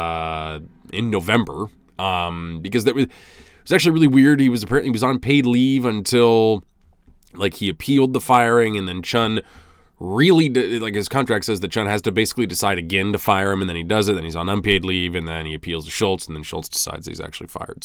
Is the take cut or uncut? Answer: uncut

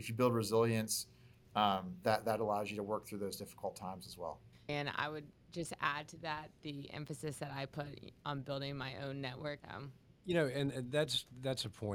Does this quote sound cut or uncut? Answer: cut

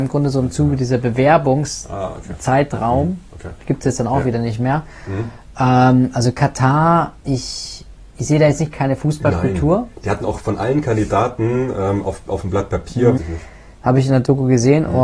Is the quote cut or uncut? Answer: cut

